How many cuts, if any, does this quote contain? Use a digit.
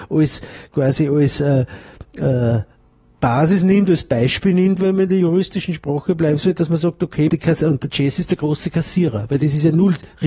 2